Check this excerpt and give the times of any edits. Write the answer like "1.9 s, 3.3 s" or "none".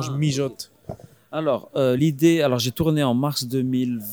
none